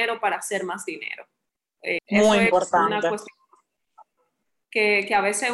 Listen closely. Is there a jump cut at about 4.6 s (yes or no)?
no